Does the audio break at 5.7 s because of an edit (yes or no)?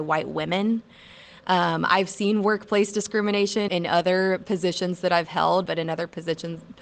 yes